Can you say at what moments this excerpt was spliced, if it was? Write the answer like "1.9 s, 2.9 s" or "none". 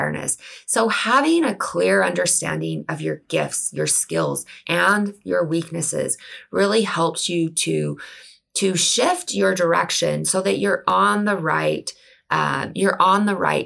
4.6 s